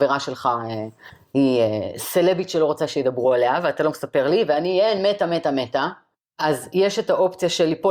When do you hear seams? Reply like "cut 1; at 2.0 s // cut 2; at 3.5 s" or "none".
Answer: none